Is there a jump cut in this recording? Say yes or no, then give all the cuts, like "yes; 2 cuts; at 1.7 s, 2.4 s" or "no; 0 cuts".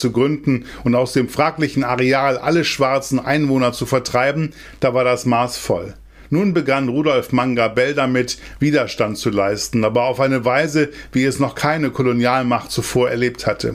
no; 0 cuts